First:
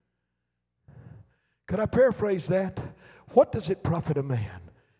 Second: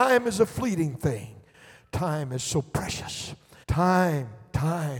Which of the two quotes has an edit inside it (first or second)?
second